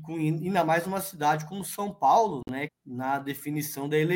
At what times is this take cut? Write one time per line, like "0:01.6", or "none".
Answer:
0:02.7